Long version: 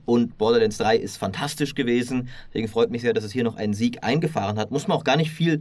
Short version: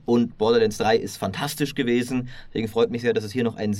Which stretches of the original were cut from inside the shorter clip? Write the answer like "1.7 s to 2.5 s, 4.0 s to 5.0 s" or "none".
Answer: none